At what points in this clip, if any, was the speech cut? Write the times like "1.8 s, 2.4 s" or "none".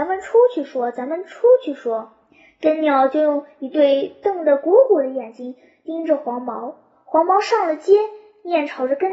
none